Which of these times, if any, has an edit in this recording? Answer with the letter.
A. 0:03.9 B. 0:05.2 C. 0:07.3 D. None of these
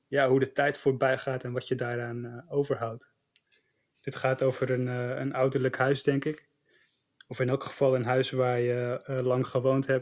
A